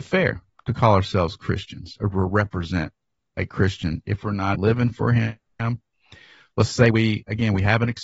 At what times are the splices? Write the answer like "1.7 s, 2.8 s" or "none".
4.5 s